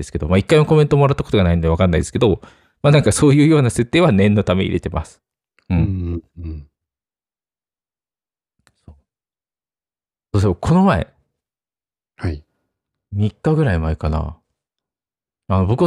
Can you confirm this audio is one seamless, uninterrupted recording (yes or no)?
yes